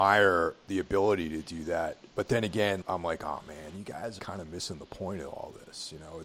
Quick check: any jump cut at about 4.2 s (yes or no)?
yes